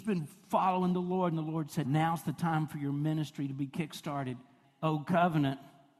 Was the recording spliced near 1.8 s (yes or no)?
yes